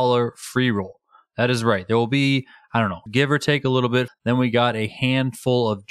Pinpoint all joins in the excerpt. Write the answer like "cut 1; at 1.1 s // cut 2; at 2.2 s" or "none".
cut 1; at 3.1 s // cut 2; at 4.1 s

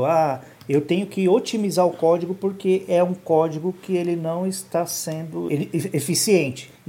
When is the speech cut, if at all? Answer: cut 1; at 5.5 s

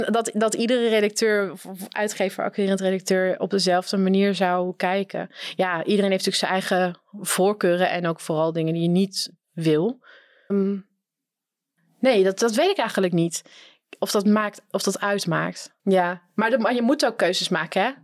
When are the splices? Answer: cut 1; at 10.5 s // cut 2; at 15.8 s

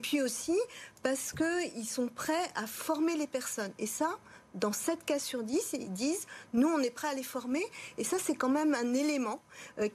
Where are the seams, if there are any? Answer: none

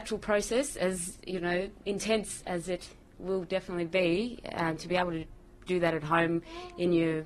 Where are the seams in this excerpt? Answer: none

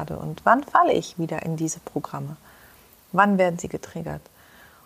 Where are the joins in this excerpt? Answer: none

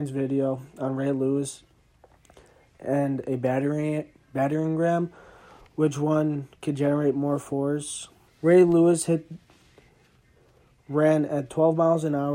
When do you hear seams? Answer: cut 1; at 8.3 s

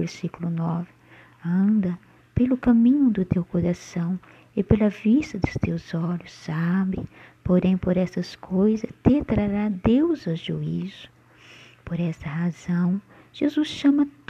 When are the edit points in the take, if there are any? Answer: none

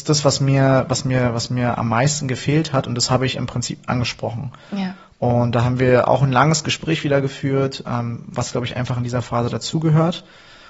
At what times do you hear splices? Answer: none

